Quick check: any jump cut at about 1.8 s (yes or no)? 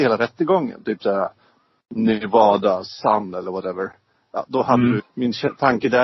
no